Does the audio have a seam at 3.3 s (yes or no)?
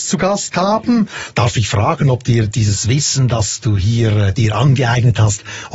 no